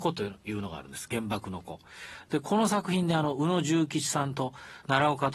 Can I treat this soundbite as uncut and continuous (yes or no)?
yes